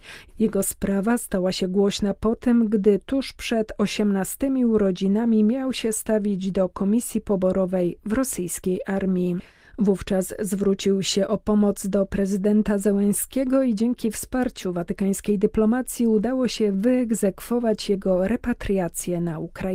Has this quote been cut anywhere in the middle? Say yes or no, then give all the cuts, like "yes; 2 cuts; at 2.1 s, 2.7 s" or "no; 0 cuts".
no; 0 cuts